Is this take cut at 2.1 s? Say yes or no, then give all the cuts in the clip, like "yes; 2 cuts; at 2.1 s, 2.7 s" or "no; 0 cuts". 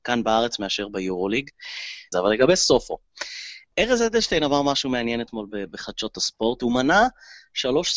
yes; 2 cuts; at 2.1 s, 3.7 s